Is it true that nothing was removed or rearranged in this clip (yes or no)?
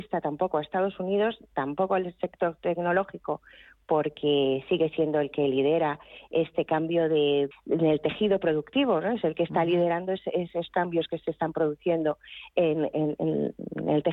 no